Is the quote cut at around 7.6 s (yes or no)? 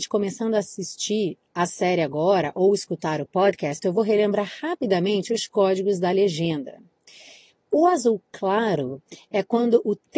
no